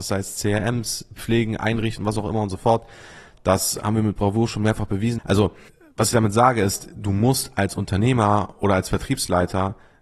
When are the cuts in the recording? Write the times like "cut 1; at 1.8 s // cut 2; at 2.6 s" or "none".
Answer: cut 1; at 5.2 s